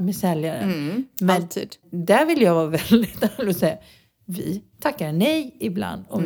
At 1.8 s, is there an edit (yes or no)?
yes